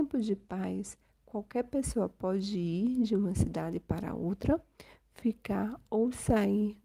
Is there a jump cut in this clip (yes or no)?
no